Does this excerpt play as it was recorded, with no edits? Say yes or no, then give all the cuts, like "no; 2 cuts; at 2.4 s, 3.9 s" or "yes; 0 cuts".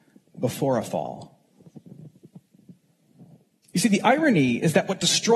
yes; 0 cuts